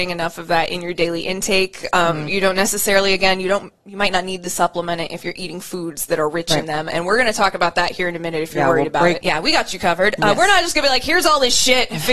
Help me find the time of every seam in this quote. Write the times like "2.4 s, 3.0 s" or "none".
9.2 s